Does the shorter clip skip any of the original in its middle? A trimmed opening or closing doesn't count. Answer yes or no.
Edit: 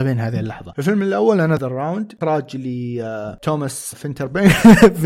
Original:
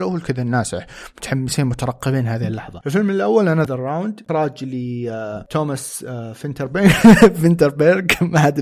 yes